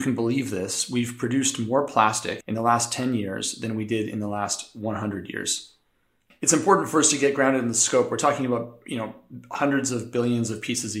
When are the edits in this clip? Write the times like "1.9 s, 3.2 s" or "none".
2.4 s